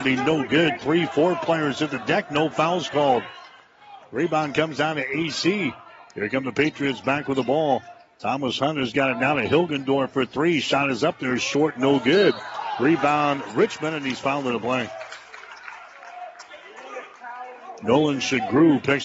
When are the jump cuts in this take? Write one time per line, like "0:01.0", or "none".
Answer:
none